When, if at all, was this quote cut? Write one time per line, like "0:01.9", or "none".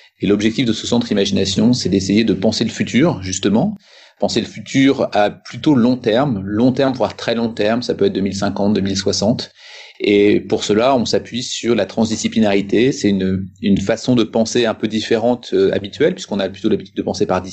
none